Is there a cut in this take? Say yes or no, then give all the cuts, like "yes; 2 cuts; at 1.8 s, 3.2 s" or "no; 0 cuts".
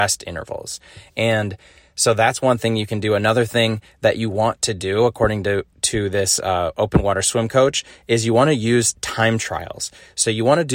no; 0 cuts